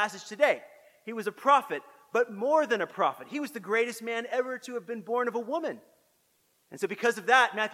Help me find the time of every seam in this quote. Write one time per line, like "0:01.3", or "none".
0:06.6